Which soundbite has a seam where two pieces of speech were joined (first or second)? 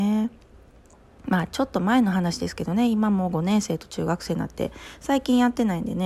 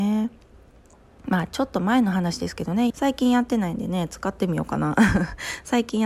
second